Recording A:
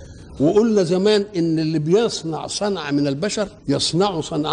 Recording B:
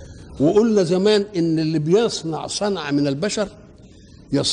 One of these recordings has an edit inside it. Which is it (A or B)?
A